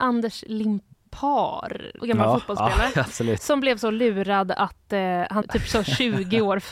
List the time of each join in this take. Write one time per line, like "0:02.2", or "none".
0:02.0
0:05.4